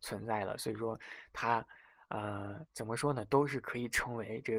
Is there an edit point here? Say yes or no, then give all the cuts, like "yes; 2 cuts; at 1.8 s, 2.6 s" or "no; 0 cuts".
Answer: no; 0 cuts